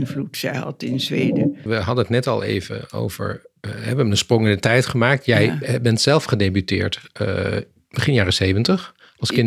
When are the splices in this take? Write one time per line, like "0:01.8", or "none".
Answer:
0:01.7